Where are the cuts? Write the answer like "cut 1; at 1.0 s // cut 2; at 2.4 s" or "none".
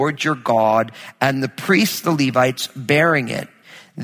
none